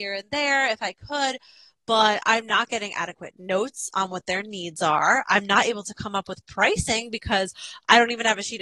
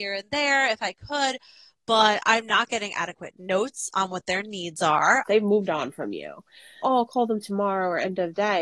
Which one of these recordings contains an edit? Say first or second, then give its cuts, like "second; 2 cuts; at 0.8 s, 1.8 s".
second; 2 cuts; at 5.2 s, 6.8 s